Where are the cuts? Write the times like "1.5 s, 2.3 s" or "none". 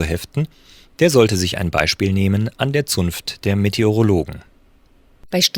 none